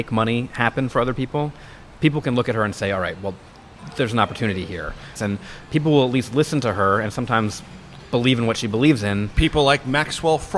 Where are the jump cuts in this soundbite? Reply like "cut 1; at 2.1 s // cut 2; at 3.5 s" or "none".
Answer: cut 1; at 5.2 s